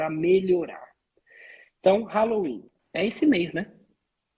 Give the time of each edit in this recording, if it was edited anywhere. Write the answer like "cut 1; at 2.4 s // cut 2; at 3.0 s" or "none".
cut 1; at 2.8 s